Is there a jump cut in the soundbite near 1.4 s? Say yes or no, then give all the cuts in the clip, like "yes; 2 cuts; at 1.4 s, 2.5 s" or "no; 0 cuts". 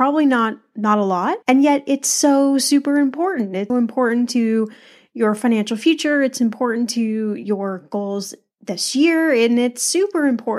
yes; 2 cuts; at 1.4 s, 3.7 s